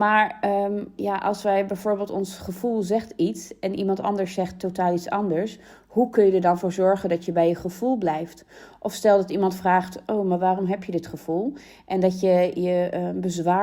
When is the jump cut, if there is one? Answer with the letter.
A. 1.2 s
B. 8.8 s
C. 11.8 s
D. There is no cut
D